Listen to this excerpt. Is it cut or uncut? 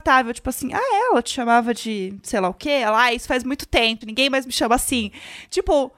cut